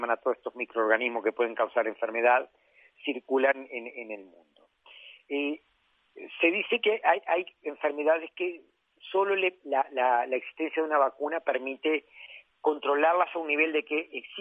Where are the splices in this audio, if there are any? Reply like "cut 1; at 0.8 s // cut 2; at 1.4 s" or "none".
none